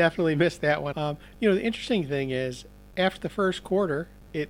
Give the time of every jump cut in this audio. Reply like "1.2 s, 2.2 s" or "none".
0.9 s